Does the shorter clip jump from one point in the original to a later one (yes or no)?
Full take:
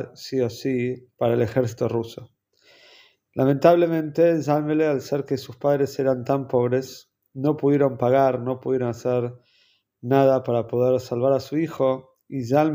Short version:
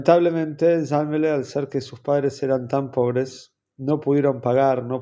no